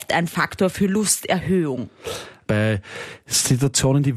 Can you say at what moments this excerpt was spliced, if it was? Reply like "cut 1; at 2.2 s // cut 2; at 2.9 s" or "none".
cut 1; at 2.5 s